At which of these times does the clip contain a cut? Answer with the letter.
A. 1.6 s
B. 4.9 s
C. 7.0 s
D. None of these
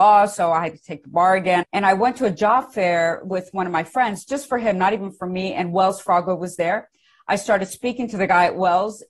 A